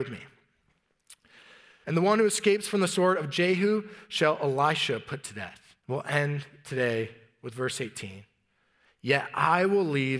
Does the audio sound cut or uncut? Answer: cut